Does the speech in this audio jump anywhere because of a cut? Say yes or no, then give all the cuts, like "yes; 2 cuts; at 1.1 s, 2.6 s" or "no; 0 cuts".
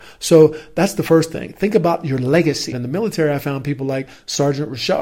yes; 1 cut; at 2.7 s